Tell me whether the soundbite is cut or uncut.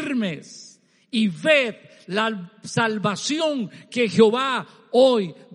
uncut